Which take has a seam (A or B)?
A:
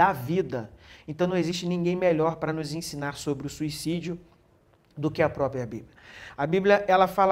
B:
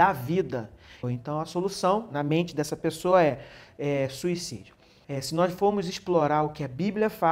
B